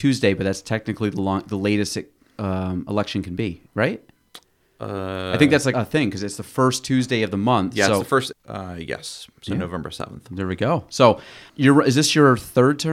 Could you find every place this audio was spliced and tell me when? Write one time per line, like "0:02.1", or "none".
0:05.7
0:08.3
0:11.5